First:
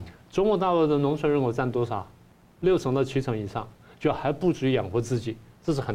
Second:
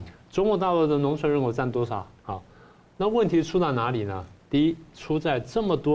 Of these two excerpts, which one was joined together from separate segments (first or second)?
second